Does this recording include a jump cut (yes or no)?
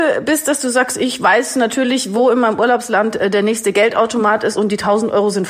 no